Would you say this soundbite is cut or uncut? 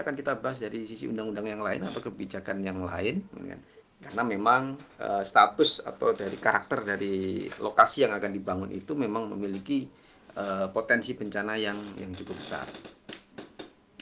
cut